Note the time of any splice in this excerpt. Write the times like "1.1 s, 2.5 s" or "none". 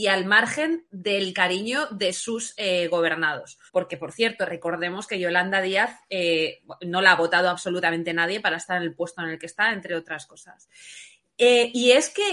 3.7 s